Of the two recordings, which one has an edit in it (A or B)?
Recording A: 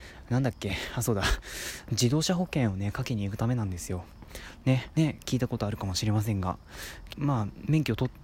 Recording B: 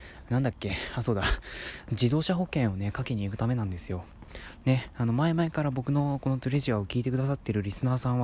A